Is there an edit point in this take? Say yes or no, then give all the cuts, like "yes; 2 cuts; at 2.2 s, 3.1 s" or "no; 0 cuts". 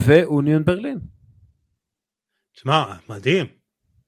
no; 0 cuts